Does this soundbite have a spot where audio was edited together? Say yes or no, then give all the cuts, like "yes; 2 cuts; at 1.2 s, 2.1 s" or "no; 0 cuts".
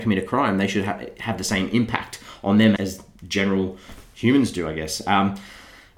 yes; 1 cut; at 2.8 s